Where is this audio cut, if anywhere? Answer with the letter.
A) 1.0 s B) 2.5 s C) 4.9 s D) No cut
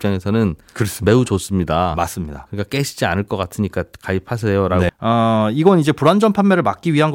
C